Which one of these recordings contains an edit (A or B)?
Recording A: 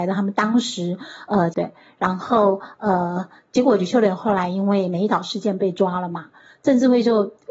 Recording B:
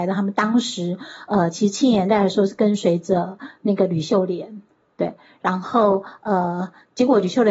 A